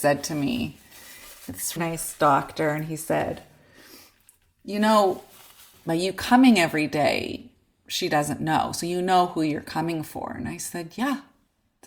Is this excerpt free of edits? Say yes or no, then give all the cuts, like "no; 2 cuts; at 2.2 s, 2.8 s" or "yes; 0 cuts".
no; 1 cut; at 1.8 s